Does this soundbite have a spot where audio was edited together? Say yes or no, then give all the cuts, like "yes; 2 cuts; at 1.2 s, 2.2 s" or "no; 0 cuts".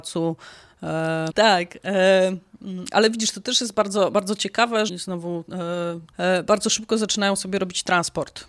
yes; 3 cuts; at 1.3 s, 4.9 s, 6.1 s